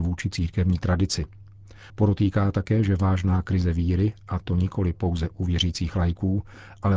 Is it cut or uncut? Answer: cut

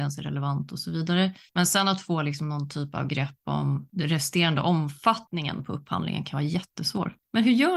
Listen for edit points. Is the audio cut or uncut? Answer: uncut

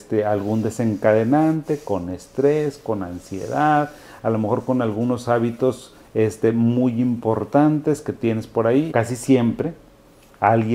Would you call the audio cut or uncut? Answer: cut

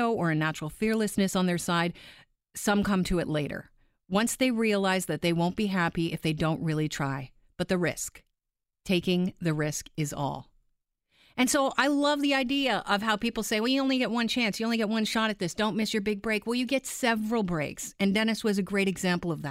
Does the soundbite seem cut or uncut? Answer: uncut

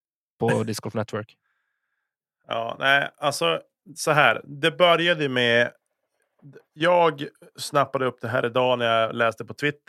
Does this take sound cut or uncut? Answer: uncut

